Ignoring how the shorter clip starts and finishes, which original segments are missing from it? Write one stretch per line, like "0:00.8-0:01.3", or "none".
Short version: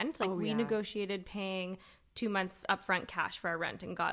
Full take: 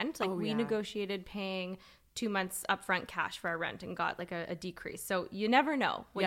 none

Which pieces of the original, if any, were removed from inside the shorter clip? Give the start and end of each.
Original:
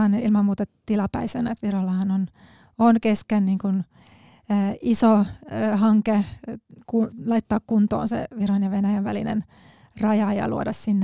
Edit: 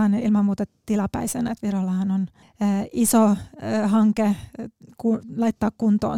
0:02.4-0:04.3

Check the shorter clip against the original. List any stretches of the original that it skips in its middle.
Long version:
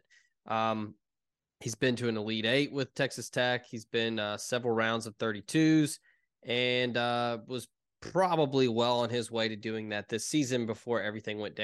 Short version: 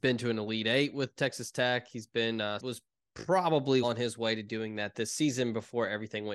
0:04.4-0:07.5
0:08.7-0:09.0

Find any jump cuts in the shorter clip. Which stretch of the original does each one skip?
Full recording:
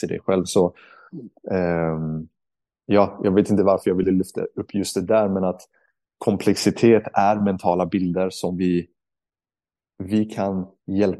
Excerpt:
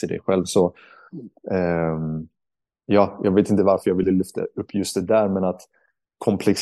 none

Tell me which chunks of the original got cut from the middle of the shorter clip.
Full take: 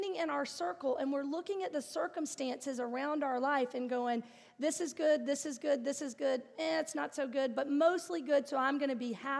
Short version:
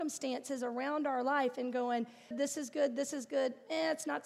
0:04.5-0:05.2

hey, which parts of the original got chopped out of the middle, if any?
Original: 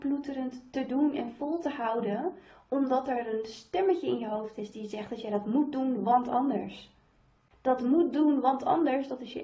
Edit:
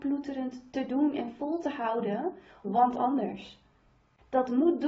0:02.6-0:06.0

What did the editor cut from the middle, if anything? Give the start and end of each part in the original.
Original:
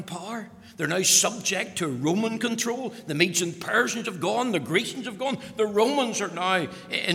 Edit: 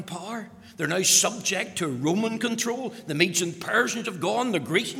none

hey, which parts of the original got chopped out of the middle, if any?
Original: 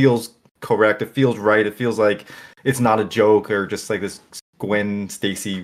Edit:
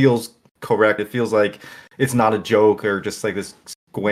0:01.0-0:01.6

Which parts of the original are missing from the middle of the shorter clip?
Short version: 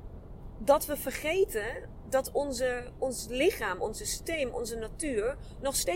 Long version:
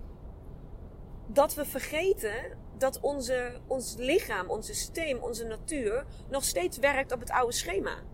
none

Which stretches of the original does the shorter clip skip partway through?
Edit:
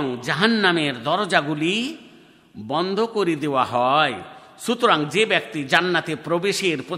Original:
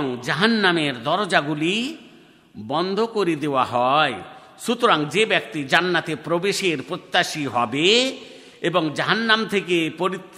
none

